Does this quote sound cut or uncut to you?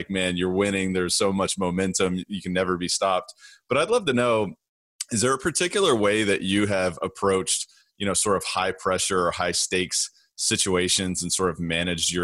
uncut